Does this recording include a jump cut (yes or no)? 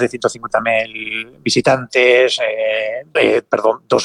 yes